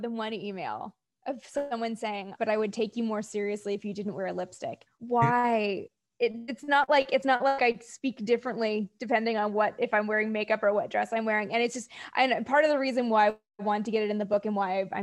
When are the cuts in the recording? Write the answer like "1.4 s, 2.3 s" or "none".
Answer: 2.4 s, 4.9 s